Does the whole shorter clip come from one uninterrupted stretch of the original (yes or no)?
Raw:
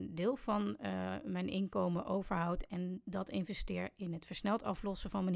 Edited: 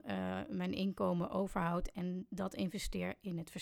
yes